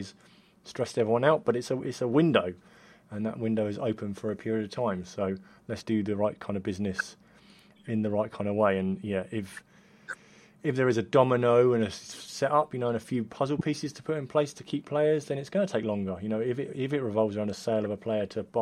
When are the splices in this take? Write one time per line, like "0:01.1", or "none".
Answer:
0:05.8